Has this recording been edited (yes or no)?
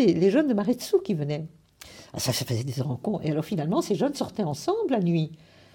no